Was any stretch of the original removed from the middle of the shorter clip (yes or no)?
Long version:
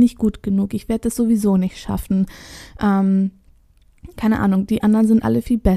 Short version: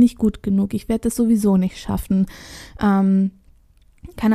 no